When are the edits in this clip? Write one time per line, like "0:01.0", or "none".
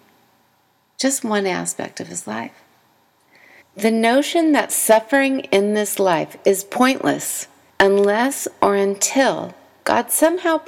0:03.6
0:07.7

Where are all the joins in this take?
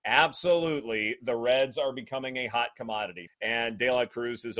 0:03.3

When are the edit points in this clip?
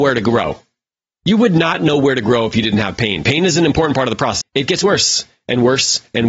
0:04.4

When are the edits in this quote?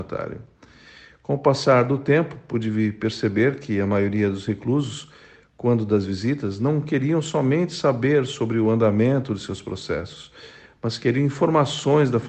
none

